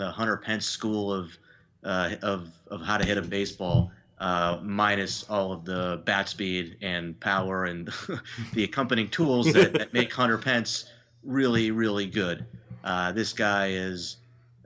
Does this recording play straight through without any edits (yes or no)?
yes